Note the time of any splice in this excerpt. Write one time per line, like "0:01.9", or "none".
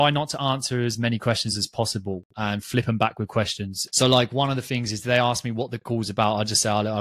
0:03.9